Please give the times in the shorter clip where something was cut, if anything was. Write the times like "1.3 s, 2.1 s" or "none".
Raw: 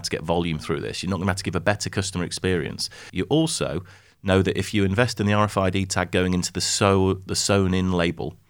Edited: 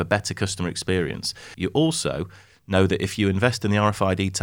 none